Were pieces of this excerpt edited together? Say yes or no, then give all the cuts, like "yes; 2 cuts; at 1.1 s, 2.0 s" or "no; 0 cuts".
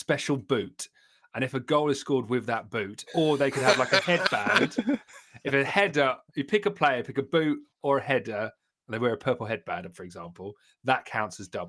no; 0 cuts